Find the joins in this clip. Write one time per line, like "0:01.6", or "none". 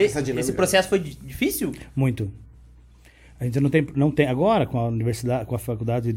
none